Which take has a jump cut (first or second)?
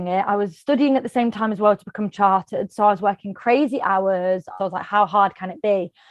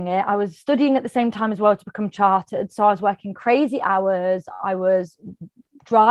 first